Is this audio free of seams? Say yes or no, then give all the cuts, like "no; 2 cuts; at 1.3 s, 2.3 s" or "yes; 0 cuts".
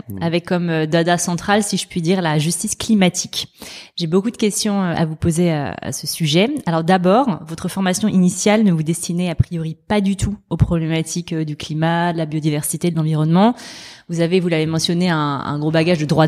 yes; 0 cuts